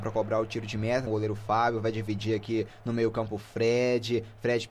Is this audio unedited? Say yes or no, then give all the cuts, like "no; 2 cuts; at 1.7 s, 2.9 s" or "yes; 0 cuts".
no; 1 cut; at 1.1 s